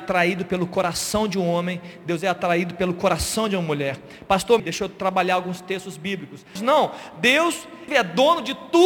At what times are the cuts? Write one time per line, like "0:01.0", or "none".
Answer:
0:04.6
0:06.6
0:07.9